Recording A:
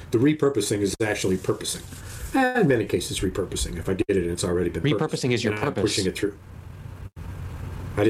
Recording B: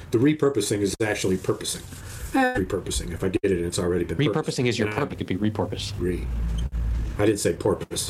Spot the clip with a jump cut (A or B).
B